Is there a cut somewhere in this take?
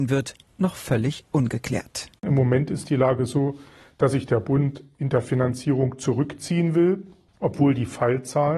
no; 0 cuts

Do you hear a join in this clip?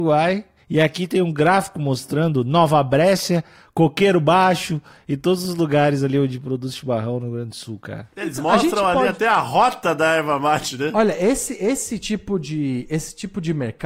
no; 0 cuts

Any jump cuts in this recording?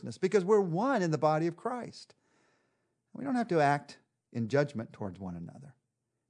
no; 0 cuts

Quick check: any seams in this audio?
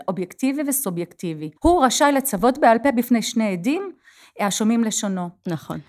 yes; 1 cut; at 1.6 s

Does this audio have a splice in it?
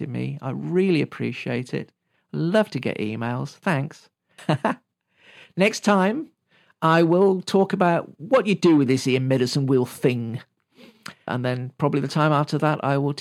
yes; 2 cuts; at 4.4 s, 11.3 s

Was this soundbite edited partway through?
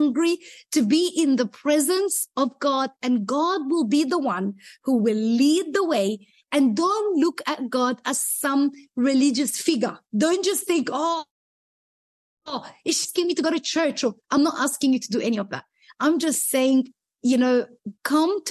no; 0 cuts

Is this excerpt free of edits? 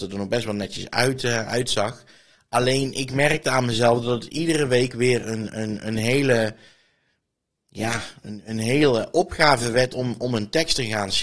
yes; 0 cuts

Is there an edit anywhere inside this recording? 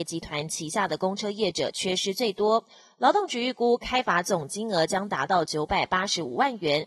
no; 0 cuts

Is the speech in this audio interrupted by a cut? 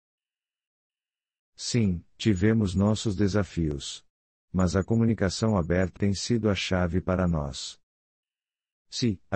yes; 1 cut; at 6.0 s

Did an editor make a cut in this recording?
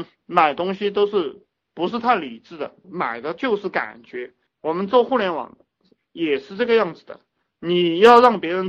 yes; 1 cut; at 4.5 s

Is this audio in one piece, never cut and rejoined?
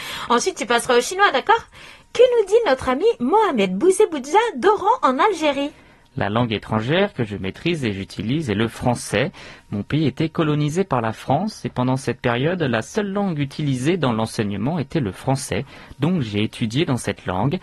yes; 0 cuts

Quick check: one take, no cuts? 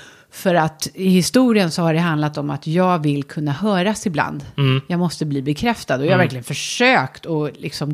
yes; 0 cuts

